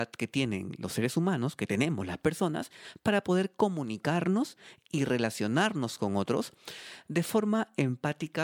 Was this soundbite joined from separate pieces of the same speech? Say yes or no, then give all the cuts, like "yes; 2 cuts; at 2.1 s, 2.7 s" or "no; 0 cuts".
no; 0 cuts